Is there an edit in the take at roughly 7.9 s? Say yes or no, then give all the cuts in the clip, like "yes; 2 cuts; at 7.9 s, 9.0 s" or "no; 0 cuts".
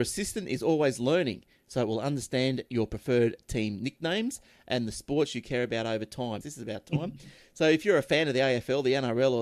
no; 1 cut; at 6.4 s